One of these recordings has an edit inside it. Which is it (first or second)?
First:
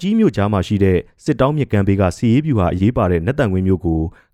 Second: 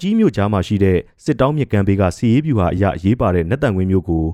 first